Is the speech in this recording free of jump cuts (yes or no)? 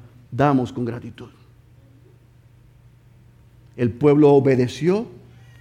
yes